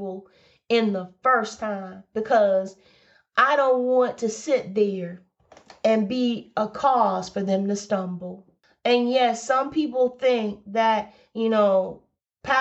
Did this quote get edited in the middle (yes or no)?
no